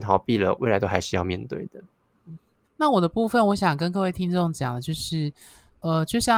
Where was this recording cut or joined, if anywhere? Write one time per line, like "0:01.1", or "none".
0:02.6